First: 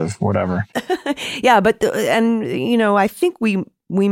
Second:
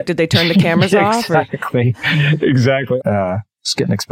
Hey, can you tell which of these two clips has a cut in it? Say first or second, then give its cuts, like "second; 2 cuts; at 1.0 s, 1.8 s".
second; 1 cut; at 3.0 s